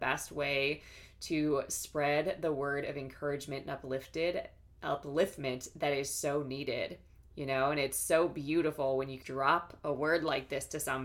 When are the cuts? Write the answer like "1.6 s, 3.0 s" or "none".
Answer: 9.2 s